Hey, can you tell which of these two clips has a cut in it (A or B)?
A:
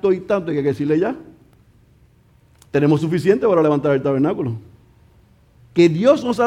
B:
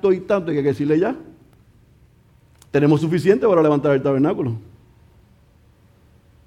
A